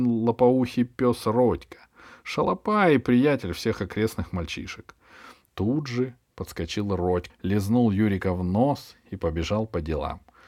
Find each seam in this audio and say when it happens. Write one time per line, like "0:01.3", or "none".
0:05.5
0:07.3